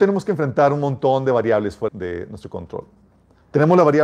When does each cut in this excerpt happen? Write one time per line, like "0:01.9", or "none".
0:01.9